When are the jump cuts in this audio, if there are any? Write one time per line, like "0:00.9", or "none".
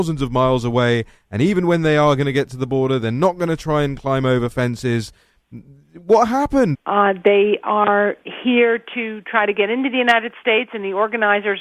0:06.7